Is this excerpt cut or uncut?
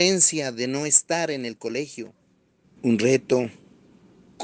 cut